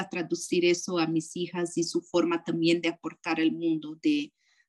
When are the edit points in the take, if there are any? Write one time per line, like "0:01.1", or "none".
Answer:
none